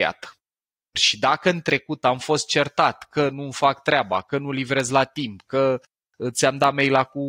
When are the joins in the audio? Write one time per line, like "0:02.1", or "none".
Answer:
0:01.0